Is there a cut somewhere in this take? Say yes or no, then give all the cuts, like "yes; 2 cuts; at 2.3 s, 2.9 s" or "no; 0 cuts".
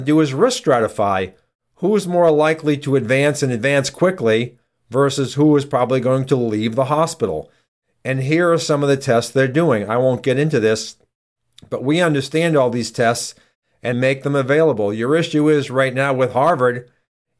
yes; 1 cut; at 13.9 s